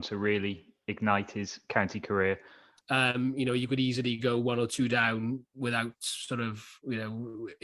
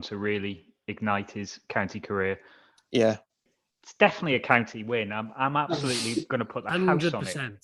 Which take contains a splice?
first; 1 cut; at 2.8 s

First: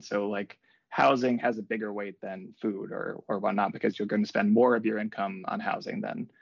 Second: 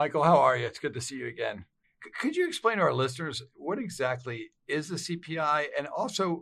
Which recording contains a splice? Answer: second; 1 cut; at 1.8 s

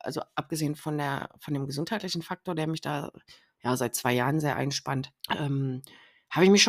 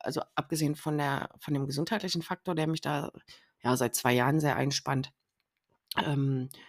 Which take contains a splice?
first; 1 cut; at 5.2 s

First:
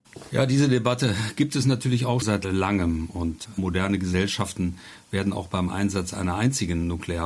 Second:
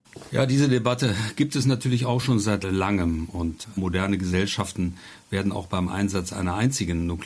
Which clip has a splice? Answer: first; 1 cut; at 2.2 s

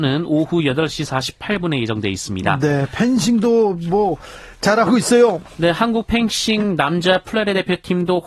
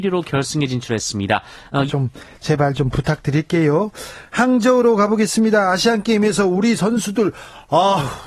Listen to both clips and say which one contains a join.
second; 1 cut; at 1.9 s

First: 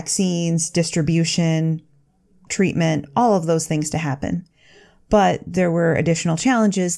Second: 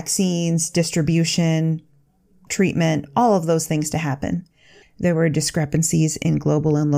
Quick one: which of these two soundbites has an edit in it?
second; 1 cut; at 4.8 s

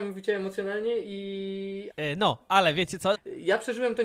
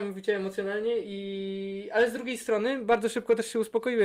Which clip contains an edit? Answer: first; 2 cuts; at 1.9 s, 3.1 s

